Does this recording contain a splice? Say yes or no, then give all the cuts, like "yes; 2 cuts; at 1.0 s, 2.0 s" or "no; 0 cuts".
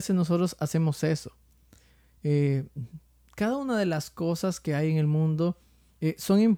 no; 0 cuts